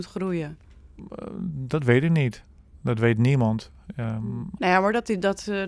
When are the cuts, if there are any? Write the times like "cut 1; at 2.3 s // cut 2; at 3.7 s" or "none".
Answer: cut 1; at 4.6 s

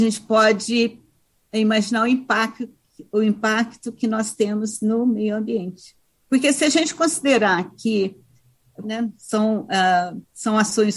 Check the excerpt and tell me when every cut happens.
cut 1; at 6.1 s // cut 2; at 8.8 s

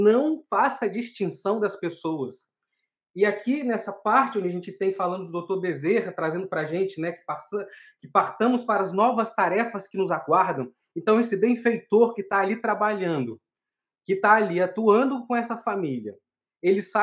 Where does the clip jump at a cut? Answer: none

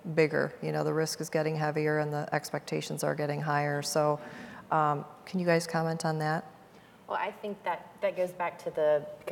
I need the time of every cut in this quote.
none

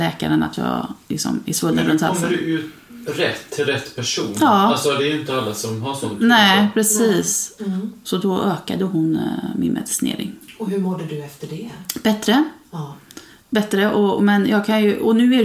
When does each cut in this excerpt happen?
cut 1; at 7.6 s

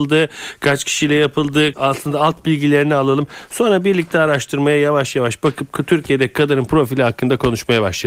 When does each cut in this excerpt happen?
cut 1; at 1.7 s

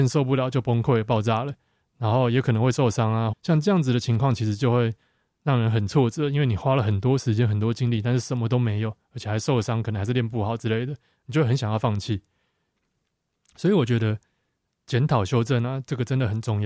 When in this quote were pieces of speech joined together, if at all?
cut 1; at 3.3 s

